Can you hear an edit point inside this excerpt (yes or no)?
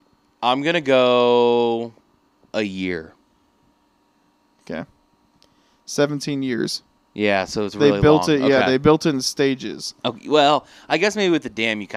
no